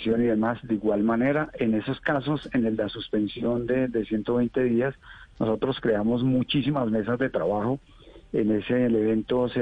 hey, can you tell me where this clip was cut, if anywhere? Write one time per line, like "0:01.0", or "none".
none